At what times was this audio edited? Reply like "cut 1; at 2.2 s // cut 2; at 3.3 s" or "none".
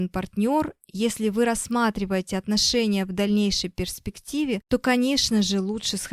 none